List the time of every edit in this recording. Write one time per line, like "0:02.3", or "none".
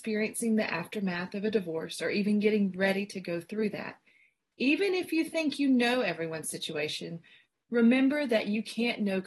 none